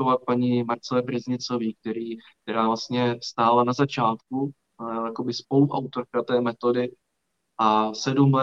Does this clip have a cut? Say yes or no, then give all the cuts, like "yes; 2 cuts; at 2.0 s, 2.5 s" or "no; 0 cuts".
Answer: no; 0 cuts